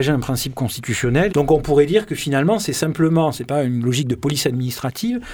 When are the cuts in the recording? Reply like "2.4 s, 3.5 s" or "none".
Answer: 1.3 s